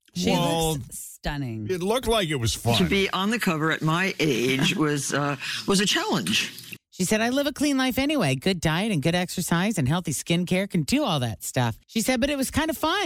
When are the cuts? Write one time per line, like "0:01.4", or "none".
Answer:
0:06.8
0:11.8

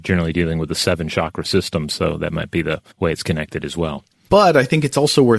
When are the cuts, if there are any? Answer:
0:02.9
0:04.3

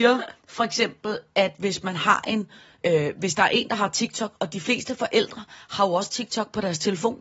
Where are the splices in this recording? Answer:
0:02.8

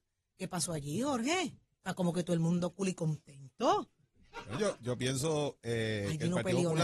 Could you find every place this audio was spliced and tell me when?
none

